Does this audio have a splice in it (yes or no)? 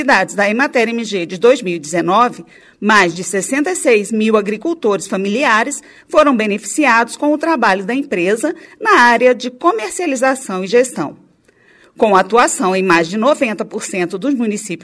no